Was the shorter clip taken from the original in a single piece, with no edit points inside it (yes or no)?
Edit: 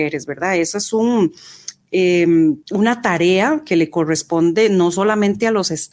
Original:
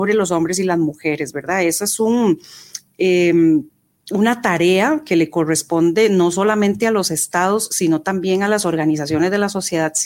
no